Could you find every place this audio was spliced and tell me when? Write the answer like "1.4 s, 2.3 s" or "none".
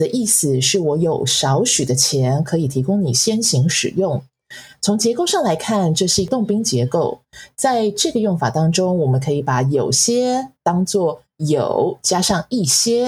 none